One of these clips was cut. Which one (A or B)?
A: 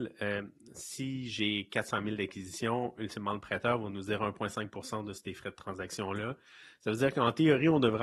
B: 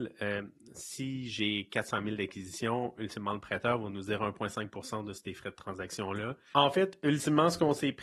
B